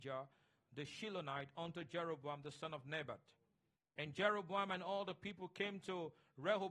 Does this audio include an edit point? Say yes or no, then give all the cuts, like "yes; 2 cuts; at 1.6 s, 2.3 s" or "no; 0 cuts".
yes; 1 cut; at 3.8 s